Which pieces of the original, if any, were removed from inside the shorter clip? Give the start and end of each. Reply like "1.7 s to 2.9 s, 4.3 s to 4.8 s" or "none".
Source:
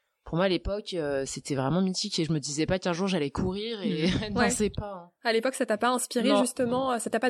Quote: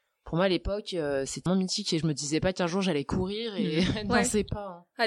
1.5 s to 1.7 s